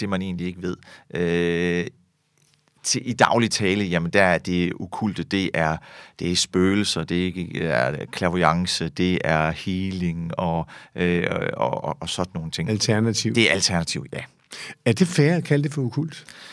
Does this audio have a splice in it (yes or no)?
no